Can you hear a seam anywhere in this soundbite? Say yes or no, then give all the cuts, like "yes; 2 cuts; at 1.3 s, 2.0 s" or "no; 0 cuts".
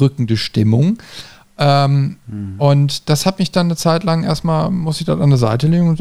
no; 0 cuts